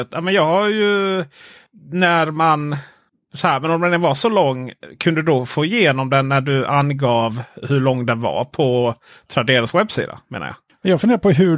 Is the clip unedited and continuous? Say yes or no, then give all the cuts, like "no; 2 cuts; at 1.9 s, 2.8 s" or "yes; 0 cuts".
yes; 0 cuts